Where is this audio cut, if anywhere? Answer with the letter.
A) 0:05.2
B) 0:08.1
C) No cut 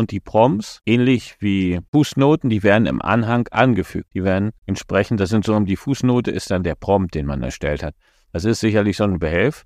C